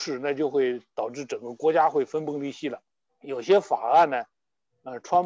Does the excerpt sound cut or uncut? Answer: cut